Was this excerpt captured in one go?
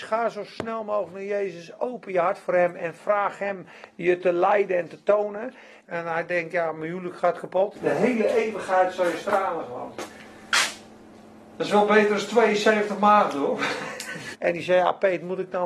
no; 3 cuts; at 5.8 s, 7.7 s, 14.3 s

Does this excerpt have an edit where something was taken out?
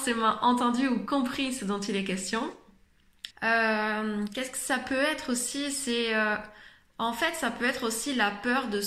yes; 1 cut; at 3.3 s

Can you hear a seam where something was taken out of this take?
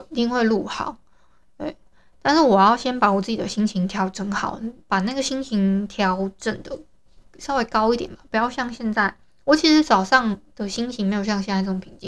no; 0 cuts

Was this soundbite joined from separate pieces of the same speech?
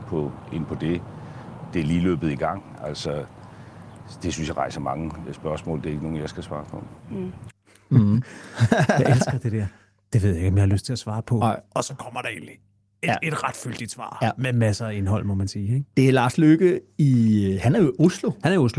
no; 0 cuts

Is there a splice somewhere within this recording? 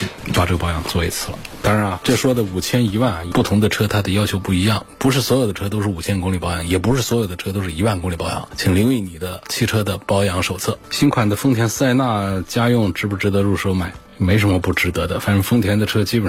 no; 0 cuts

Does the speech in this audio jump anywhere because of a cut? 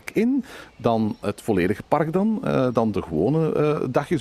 no; 0 cuts

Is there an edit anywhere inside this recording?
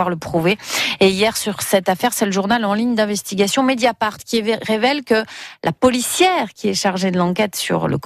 no; 0 cuts

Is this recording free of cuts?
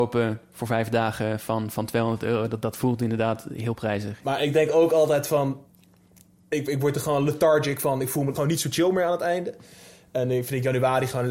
no; 2 cuts; at 4.2 s, 8.3 s

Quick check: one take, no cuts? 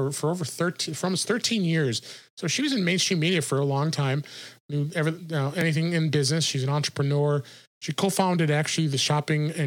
yes; 0 cuts

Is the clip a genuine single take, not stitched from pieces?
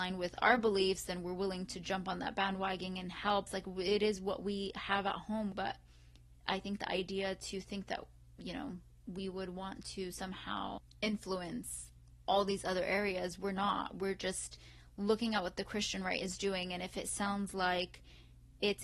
no; 2 cuts; at 3.5 s, 5.5 s

